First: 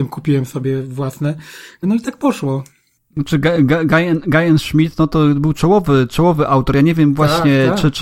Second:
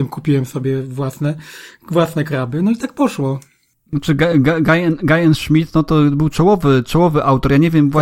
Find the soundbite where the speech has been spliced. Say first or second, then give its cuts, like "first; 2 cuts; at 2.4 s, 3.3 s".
first; 1 cut; at 1.8 s